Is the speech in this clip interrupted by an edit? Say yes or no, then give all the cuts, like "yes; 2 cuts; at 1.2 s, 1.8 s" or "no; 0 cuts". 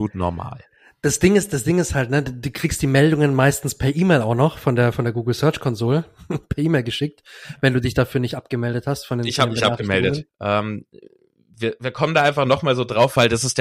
yes; 1 cut; at 10.3 s